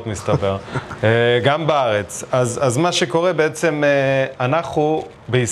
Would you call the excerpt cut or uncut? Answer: uncut